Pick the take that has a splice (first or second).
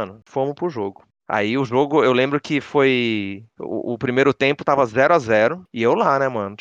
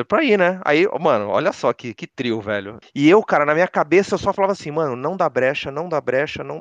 second